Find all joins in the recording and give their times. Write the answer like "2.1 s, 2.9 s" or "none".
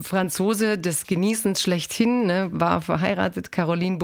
none